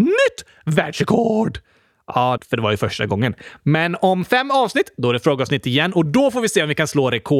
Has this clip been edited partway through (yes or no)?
yes